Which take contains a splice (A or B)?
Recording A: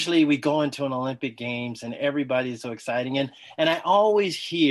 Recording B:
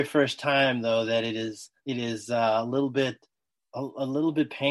B